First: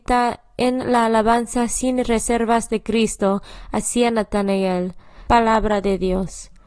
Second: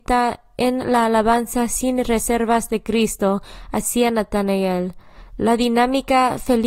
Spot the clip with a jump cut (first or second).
first